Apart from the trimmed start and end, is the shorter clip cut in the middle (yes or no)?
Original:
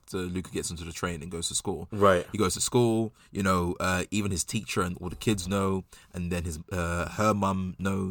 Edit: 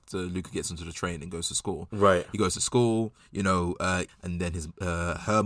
yes